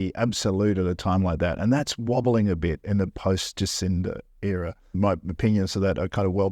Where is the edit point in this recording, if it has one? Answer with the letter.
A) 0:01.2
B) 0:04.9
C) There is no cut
B